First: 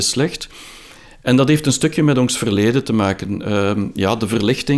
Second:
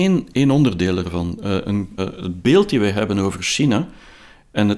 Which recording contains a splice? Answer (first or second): second